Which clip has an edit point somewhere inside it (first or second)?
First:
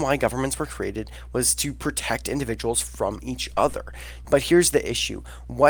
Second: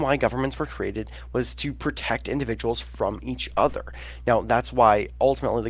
first